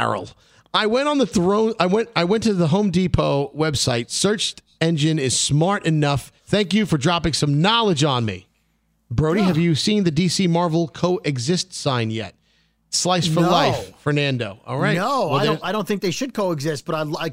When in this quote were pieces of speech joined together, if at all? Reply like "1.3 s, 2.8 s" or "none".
6.4 s